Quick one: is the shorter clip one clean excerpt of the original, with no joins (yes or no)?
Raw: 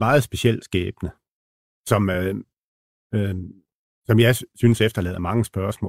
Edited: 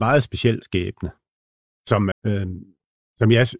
no